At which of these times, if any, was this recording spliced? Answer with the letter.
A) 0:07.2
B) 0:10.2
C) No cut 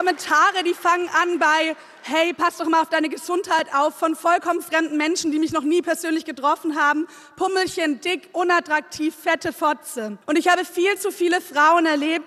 B